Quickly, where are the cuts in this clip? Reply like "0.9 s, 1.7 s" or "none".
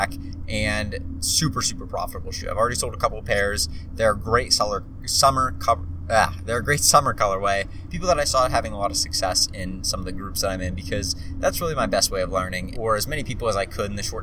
7.9 s, 12.7 s